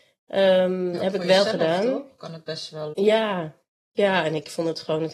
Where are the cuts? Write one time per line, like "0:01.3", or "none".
0:02.9